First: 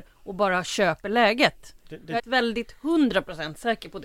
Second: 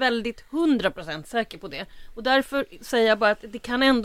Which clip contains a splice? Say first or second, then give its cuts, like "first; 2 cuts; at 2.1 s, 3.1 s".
first; 1 cut; at 2.2 s